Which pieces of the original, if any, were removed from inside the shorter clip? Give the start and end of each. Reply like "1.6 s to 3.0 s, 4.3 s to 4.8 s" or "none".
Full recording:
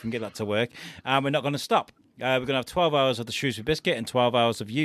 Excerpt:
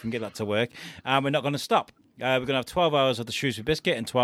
none